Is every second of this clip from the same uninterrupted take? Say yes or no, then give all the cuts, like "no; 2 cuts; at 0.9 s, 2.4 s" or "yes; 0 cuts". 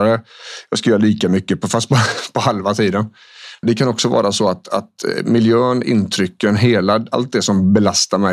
no; 1 cut; at 3.6 s